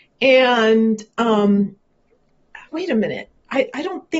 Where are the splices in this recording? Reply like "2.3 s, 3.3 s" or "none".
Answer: 2.7 s